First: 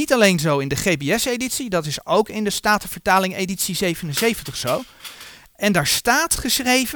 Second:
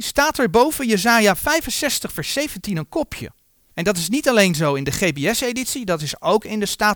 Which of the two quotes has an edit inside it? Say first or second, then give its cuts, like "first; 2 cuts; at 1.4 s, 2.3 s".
second; 1 cut; at 3.7 s